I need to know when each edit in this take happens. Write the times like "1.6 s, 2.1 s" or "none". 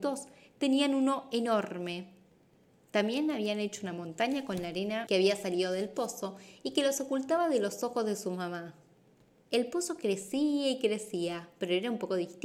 none